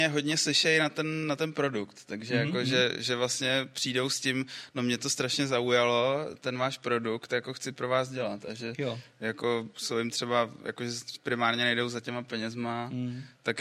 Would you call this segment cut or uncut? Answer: uncut